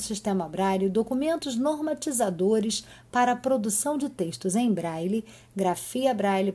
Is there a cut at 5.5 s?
no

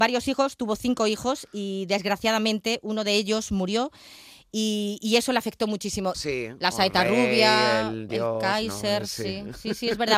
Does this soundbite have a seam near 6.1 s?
yes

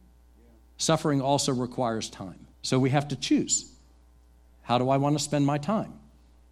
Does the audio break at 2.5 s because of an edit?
yes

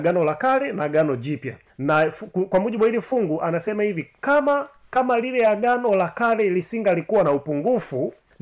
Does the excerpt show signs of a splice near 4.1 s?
no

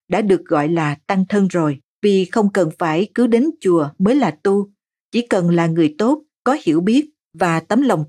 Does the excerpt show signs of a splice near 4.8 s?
no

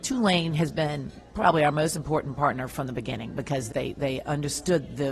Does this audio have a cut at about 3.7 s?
yes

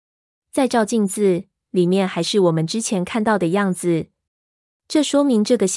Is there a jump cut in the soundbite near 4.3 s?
yes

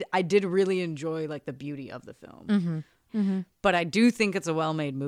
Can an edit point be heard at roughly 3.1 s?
yes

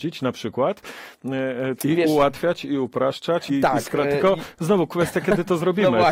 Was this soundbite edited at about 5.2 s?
no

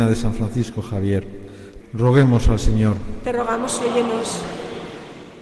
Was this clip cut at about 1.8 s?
yes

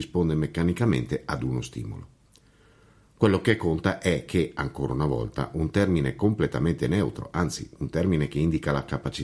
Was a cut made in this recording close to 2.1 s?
no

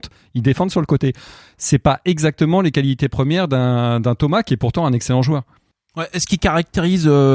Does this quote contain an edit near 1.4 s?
no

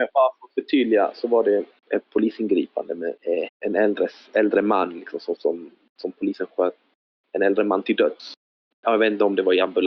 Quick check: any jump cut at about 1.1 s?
no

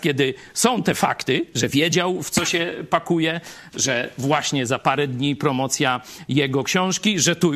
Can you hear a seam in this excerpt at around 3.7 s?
no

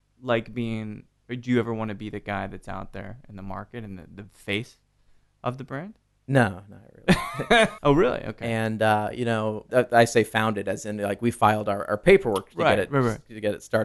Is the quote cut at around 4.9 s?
no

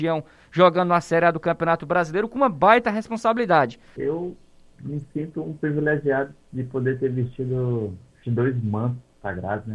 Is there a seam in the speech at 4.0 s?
yes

